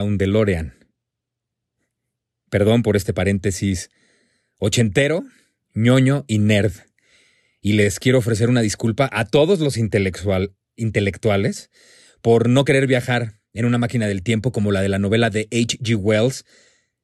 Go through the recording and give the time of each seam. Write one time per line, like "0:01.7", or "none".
none